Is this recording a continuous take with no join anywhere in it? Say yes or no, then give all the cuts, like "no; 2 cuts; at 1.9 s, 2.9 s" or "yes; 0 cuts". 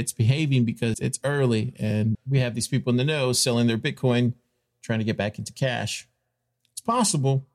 no; 2 cuts; at 0.9 s, 2.1 s